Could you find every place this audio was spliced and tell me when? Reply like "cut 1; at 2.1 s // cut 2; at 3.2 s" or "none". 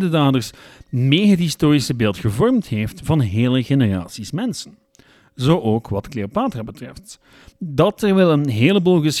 none